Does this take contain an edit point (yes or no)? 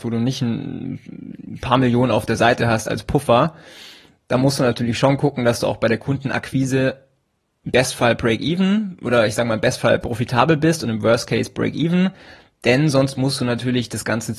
no